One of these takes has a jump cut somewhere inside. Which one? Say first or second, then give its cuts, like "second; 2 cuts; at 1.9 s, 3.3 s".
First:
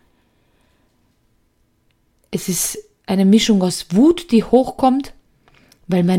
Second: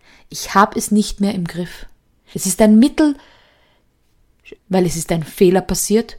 second; 2 cuts; at 2.3 s, 4.6 s